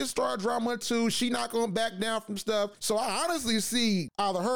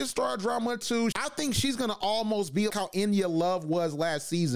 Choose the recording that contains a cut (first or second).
second